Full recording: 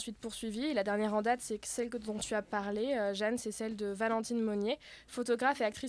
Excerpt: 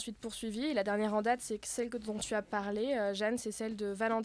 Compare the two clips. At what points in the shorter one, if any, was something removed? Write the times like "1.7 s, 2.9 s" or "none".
none